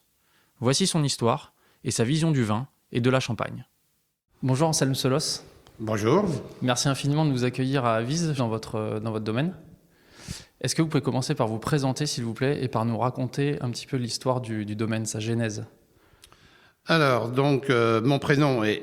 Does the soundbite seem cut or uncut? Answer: cut